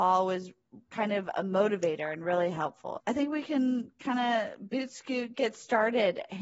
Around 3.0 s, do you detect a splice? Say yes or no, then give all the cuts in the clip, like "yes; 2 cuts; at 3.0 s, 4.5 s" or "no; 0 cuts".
yes; 1 cut; at 3.0 s